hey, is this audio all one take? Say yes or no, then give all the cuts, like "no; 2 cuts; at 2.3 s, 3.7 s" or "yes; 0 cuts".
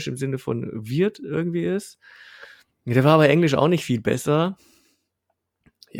yes; 0 cuts